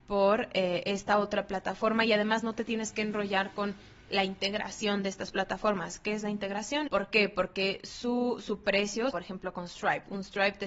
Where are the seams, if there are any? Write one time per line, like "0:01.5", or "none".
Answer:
0:06.9
0:09.1